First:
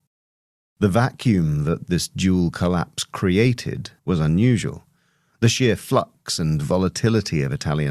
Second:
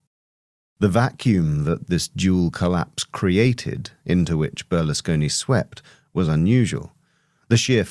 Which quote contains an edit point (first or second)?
first